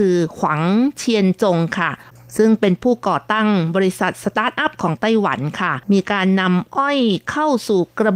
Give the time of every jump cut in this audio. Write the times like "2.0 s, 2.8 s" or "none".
5.8 s